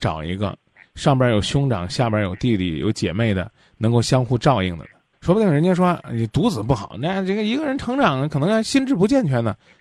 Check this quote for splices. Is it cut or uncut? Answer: cut